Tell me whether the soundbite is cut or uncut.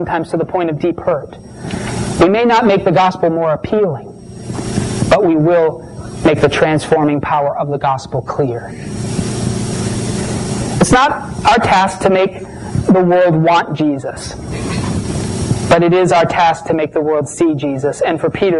uncut